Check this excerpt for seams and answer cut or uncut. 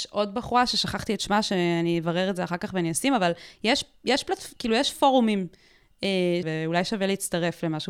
cut